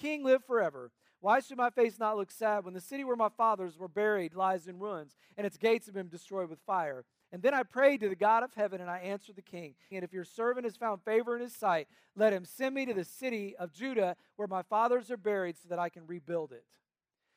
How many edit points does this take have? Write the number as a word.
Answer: two